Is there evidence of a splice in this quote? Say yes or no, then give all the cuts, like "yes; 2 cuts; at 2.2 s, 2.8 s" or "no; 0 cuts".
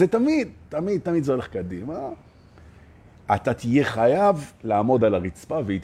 no; 0 cuts